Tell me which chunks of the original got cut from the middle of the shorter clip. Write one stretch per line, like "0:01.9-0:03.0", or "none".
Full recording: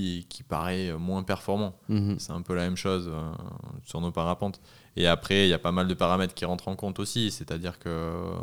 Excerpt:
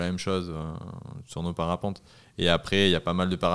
none